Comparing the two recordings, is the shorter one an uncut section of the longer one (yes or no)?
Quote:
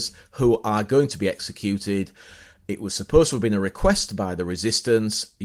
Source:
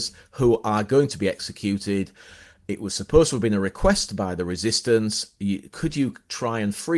yes